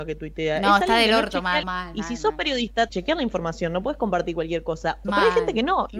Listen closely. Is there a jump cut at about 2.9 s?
yes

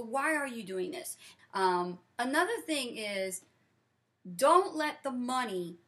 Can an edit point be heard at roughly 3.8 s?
no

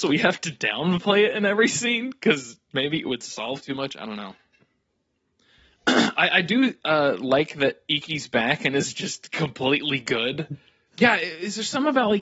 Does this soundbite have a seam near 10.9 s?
yes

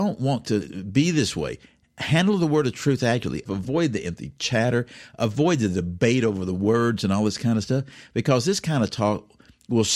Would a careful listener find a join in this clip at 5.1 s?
no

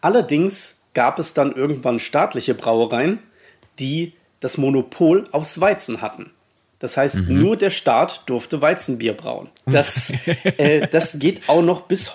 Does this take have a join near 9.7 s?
yes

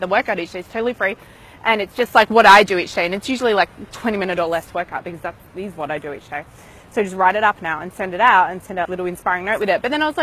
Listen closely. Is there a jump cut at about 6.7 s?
no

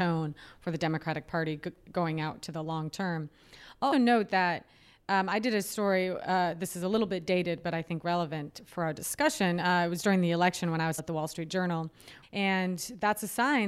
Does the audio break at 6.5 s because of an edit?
no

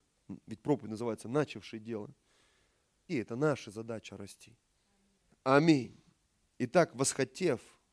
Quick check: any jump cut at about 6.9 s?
no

